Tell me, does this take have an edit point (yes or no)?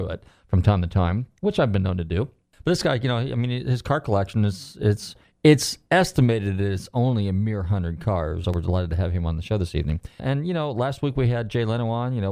yes